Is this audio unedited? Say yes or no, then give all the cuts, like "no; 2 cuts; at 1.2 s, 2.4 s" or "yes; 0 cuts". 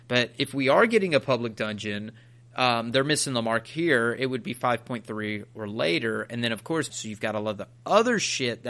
no; 1 cut; at 6.9 s